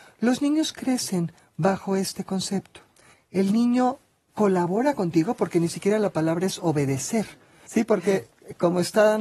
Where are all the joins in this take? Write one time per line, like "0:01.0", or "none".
0:03.1
0:07.7